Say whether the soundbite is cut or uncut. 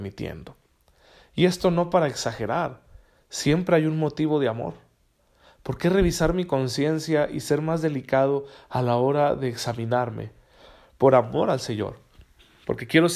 uncut